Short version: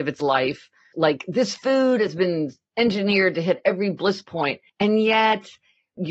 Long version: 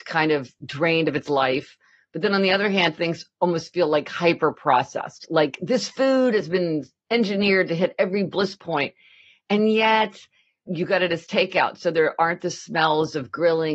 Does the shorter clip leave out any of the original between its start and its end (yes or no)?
yes